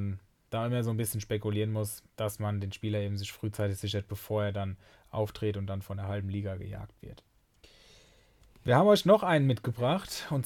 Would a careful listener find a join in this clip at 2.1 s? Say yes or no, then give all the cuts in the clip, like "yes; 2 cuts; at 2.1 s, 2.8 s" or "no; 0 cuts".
yes; 1 cut; at 2.1 s